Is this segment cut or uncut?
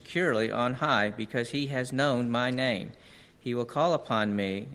uncut